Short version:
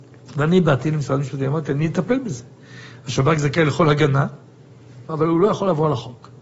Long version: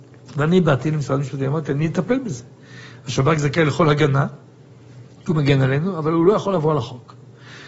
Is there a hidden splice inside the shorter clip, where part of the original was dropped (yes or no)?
yes